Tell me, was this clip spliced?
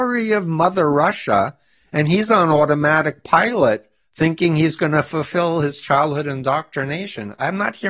no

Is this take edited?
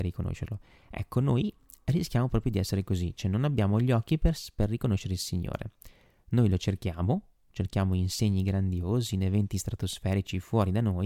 no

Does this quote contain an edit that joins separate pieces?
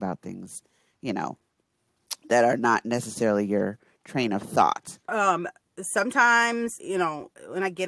yes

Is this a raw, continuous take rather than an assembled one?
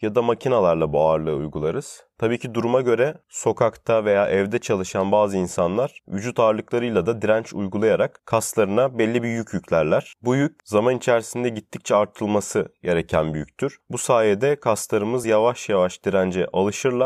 yes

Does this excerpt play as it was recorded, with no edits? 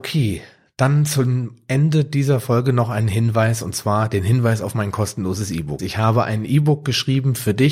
no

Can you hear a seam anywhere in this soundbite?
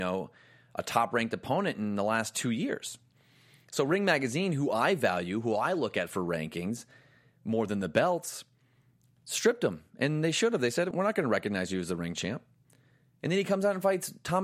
yes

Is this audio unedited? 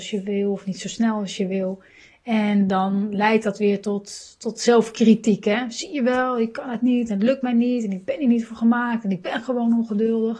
yes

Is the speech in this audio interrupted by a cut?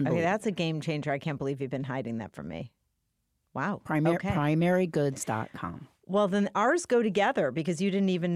no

